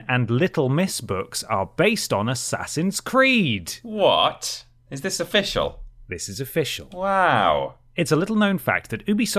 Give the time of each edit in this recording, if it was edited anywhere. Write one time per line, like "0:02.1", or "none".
none